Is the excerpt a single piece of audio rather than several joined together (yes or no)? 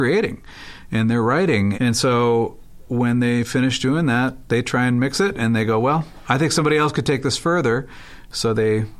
no